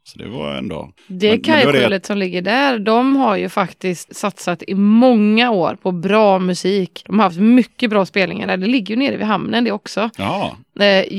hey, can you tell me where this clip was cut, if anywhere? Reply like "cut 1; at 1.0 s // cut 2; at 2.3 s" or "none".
cut 1; at 4.1 s